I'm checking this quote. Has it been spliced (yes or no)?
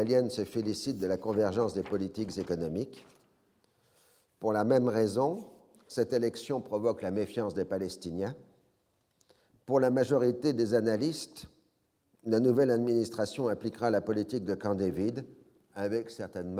no